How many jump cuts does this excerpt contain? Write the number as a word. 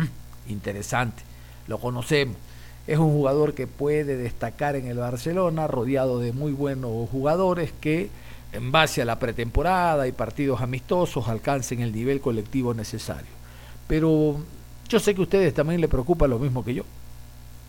one